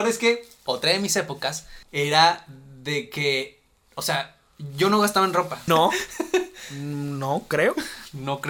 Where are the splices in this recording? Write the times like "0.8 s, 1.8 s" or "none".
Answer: 1.8 s, 5.7 s

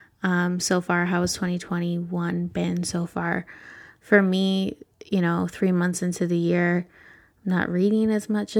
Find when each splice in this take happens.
none

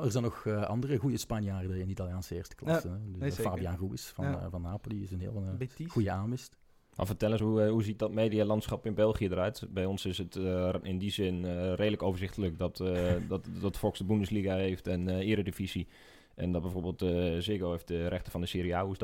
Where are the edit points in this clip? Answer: none

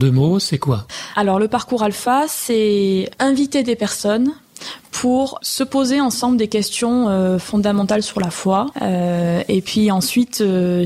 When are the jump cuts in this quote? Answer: 8.7 s

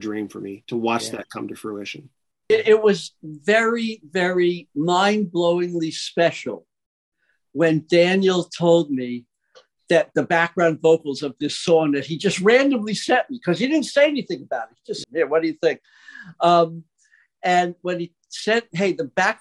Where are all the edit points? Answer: 15.0 s

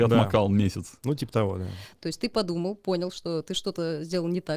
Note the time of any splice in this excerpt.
1.9 s

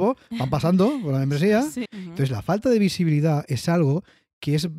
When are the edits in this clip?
1.9 s

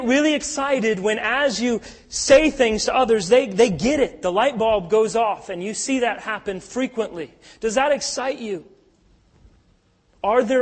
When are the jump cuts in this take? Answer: none

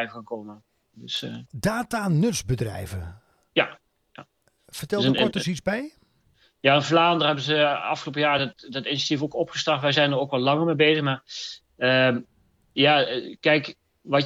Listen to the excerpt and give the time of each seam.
none

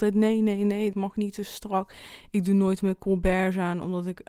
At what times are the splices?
0.9 s

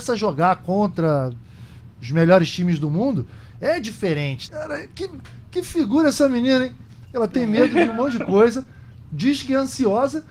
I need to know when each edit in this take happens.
4.5 s

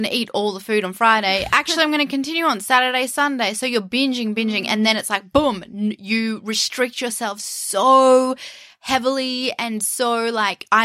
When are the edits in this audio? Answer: none

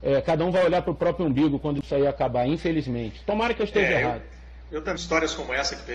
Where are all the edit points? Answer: 5.0 s

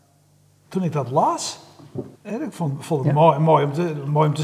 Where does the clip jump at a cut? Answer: 2.2 s

